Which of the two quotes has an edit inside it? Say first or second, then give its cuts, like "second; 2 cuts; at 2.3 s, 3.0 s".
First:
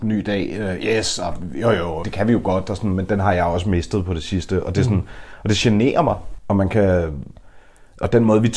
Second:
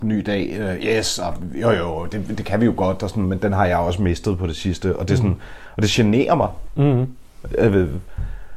first; 2 cuts; at 2.0 s, 6.4 s